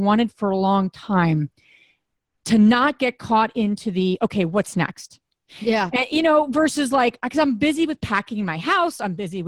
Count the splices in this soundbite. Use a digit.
0